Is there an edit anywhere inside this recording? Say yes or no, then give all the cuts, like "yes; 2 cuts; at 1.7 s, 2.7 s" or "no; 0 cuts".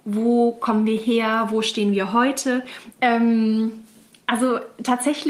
yes; 1 cut; at 2.9 s